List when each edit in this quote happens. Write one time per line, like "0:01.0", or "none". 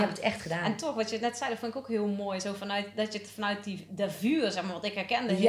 none